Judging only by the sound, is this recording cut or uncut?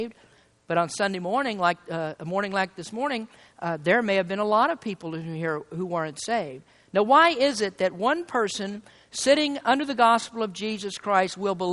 uncut